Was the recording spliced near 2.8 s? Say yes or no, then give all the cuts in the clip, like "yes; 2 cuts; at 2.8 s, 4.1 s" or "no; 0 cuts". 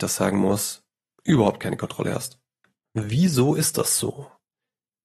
yes; 1 cut; at 2.8 s